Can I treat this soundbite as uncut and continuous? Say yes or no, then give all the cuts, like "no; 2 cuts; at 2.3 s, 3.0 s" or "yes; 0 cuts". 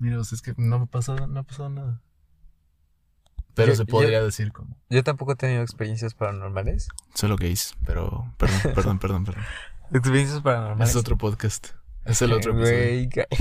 no; 1 cut; at 3.5 s